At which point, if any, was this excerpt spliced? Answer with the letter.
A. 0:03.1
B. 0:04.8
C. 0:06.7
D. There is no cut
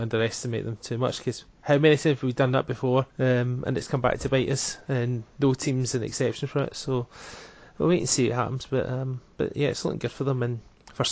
A